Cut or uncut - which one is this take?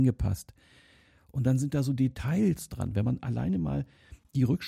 uncut